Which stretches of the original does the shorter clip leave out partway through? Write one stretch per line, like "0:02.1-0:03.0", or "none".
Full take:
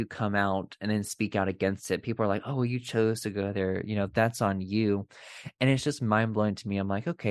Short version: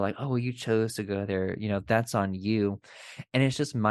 none